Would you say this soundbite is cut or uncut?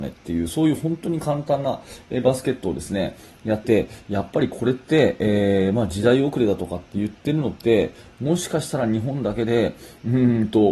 cut